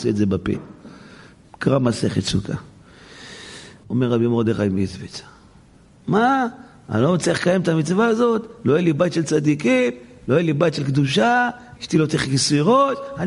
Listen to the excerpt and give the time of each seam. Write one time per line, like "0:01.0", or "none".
0:03.8
0:11.8